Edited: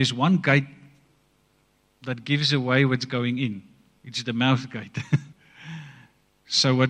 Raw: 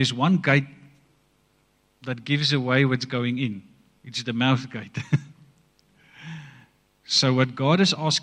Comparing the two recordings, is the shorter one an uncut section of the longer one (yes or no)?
no